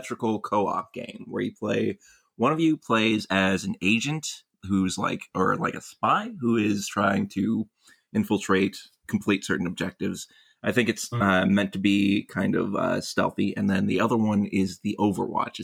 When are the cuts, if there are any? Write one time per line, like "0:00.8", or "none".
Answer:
none